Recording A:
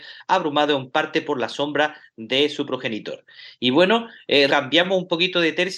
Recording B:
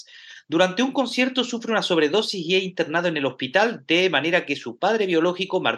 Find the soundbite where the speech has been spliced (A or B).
A